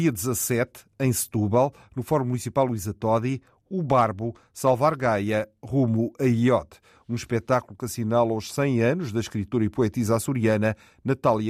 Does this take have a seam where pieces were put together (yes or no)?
no